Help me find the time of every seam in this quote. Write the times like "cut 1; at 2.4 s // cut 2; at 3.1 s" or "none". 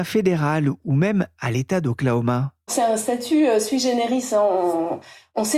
cut 1; at 2.7 s